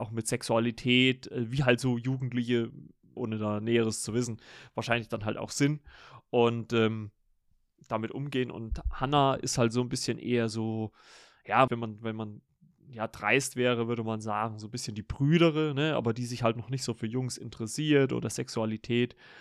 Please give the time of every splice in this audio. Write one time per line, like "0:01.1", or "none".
0:03.2
0:11.7